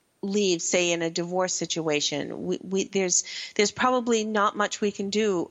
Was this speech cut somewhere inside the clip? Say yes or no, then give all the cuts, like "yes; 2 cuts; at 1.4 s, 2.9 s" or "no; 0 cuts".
no; 0 cuts